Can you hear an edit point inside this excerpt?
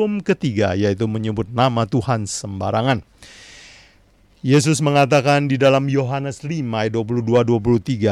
no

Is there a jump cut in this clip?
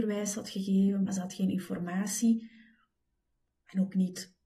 yes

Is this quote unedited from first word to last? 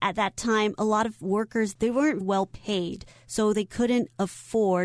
no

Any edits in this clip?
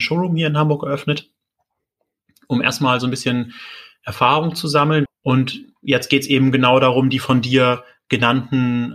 yes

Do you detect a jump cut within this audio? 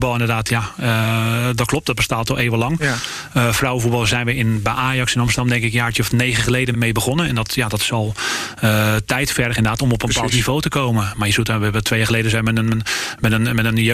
yes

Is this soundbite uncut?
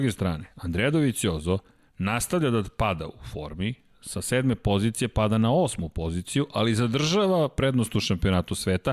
yes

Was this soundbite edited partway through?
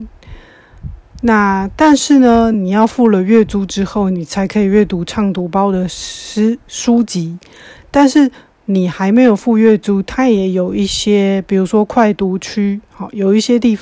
no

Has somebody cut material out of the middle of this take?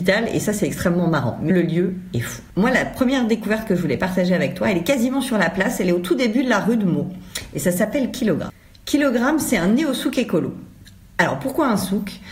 yes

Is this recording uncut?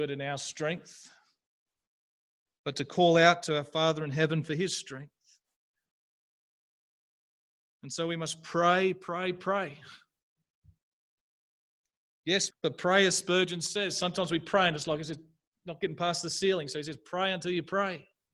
no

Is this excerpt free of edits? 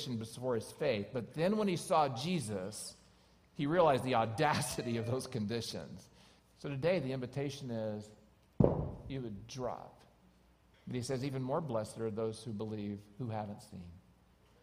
no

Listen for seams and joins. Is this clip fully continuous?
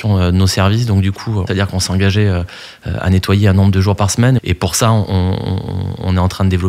no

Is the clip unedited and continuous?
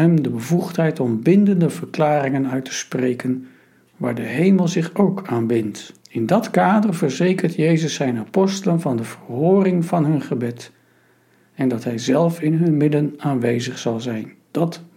no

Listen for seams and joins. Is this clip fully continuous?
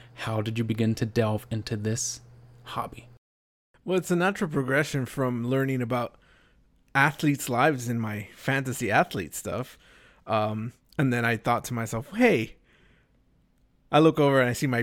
yes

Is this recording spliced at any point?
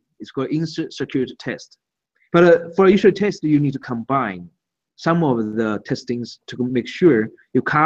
yes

